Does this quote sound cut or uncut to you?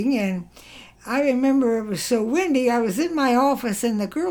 cut